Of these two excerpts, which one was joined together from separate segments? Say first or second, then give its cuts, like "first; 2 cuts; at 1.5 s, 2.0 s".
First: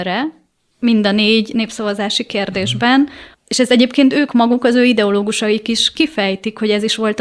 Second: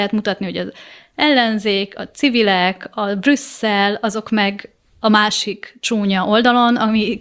first; 1 cut; at 3.3 s